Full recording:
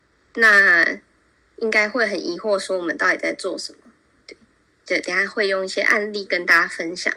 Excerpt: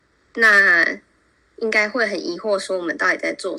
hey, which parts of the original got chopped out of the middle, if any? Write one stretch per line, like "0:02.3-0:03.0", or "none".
none